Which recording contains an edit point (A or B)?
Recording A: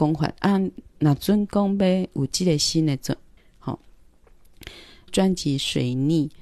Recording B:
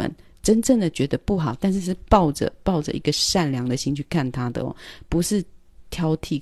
A